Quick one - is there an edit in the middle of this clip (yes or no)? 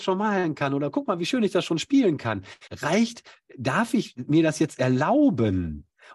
yes